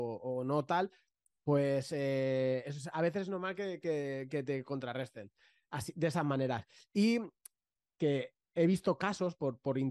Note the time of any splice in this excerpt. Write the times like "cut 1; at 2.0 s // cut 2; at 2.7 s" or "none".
none